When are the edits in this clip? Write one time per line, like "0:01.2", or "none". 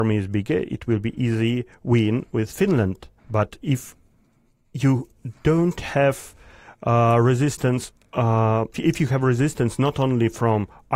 0:03.2
0:08.7